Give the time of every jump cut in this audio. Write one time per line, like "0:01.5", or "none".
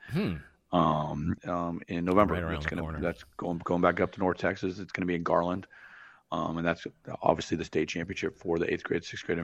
0:01.4